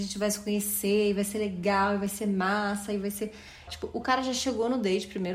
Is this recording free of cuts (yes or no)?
no